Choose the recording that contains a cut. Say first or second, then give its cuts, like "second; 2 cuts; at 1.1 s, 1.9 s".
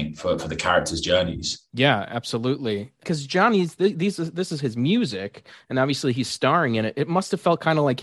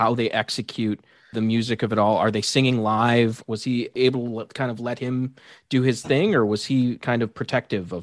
second; 2 cuts; at 3.5 s, 7.0 s